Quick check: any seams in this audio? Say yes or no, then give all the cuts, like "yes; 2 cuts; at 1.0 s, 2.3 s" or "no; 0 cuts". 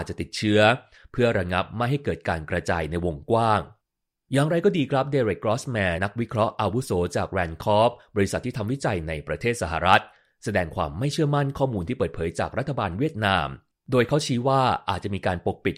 yes; 1 cut; at 6.0 s